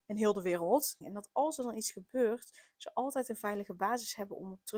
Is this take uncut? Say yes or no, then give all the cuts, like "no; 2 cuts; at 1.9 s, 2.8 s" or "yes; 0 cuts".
no; 1 cut; at 1.0 s